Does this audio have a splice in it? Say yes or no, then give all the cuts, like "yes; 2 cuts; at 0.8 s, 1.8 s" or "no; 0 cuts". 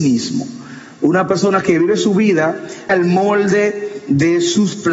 yes; 1 cut; at 2.9 s